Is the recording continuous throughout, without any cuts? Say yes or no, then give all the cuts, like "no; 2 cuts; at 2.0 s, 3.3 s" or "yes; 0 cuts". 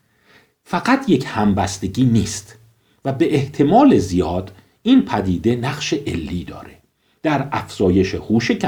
yes; 0 cuts